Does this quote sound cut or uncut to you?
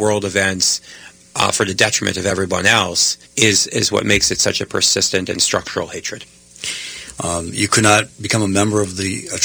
cut